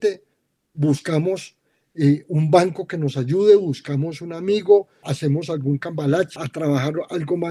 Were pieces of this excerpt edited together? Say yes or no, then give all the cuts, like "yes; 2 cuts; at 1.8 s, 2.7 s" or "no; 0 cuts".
yes; 2 cuts; at 5.0 s, 6.4 s